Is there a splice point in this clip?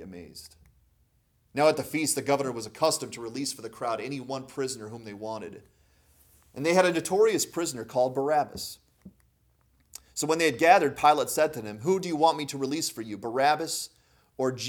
no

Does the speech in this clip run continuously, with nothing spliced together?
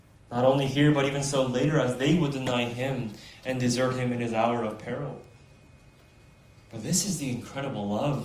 yes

